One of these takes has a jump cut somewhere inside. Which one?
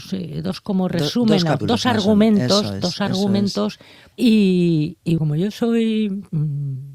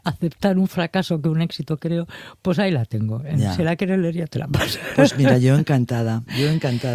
first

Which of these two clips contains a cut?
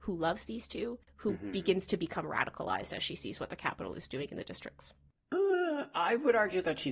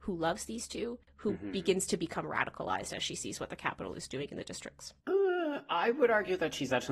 second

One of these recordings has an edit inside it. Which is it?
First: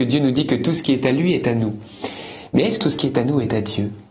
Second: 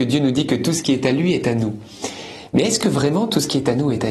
first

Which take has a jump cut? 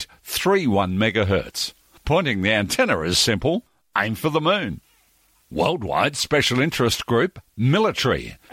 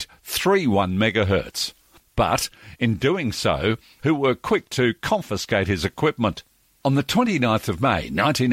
second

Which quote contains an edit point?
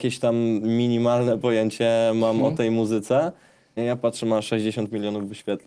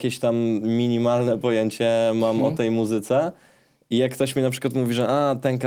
first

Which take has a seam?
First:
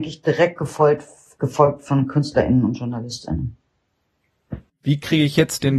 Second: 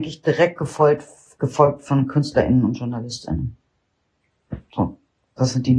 first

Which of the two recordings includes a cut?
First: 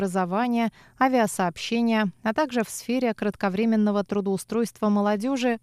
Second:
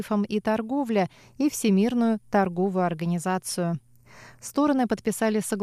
second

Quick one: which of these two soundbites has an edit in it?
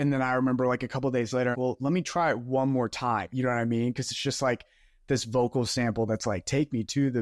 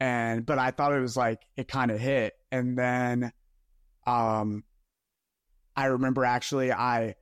first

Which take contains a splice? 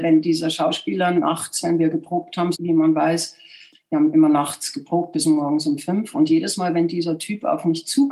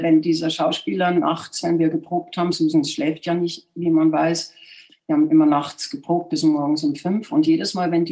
first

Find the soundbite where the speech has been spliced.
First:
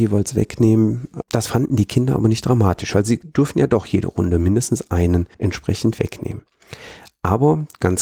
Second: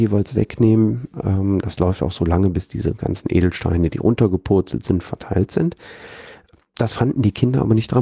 first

